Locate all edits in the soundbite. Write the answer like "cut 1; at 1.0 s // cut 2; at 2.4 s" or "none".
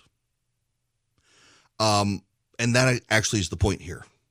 none